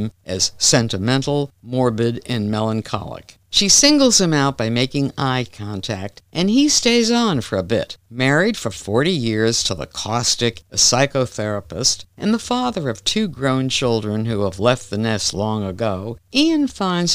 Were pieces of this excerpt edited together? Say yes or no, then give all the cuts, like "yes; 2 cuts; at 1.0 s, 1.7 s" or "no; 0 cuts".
yes; 2 cuts; at 3.4 s, 10.6 s